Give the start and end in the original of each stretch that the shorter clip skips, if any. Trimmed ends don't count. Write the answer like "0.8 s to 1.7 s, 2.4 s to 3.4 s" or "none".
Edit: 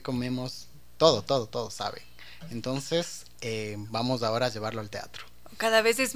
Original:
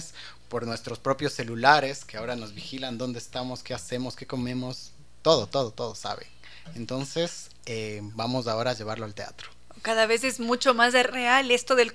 none